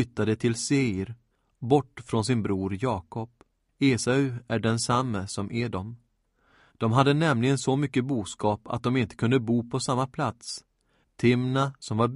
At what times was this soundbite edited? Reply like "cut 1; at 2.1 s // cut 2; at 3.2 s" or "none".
cut 1; at 3.7 s // cut 2; at 6.7 s // cut 3; at 11.0 s